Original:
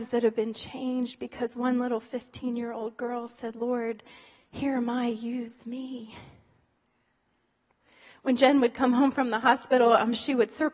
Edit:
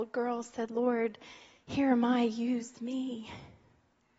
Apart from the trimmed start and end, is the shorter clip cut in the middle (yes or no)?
no